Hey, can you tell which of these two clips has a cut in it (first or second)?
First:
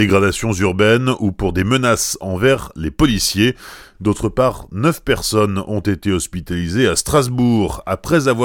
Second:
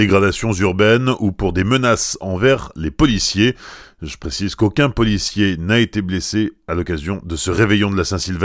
first